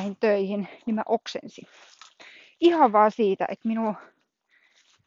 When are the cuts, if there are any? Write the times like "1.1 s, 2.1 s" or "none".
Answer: none